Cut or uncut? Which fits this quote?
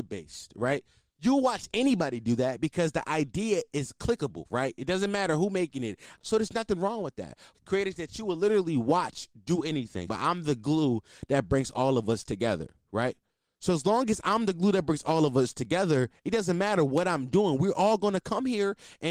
cut